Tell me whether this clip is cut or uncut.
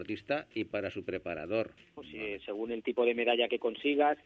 cut